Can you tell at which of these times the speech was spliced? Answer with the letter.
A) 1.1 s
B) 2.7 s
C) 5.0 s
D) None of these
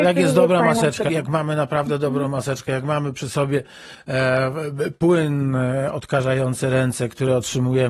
A